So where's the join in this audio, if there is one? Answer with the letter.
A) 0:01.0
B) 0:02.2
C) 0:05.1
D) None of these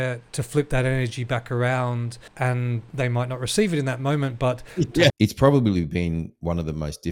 C